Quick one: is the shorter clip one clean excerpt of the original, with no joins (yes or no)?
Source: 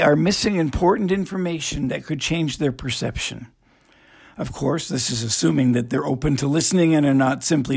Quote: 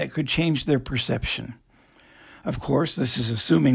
yes